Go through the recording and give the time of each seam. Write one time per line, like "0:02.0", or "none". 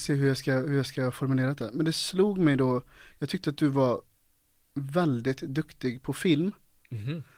none